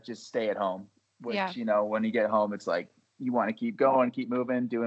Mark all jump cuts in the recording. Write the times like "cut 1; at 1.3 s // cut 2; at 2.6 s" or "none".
none